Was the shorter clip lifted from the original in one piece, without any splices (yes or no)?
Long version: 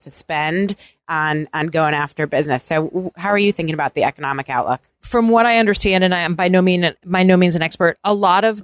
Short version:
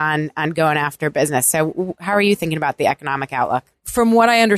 yes